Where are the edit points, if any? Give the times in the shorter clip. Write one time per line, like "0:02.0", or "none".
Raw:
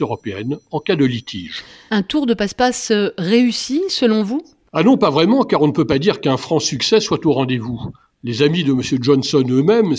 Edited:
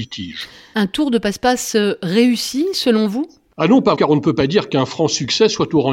0:03.9